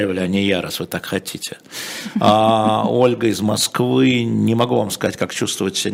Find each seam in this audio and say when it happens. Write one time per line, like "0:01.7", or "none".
none